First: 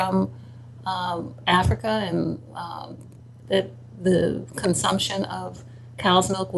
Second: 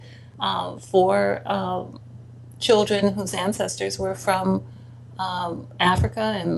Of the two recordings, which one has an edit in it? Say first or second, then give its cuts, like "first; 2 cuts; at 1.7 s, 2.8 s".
first; 1 cut; at 3.4 s